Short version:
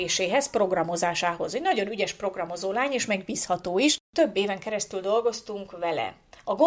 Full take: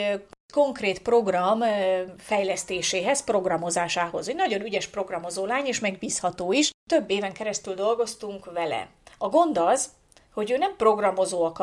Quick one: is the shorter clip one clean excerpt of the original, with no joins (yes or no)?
yes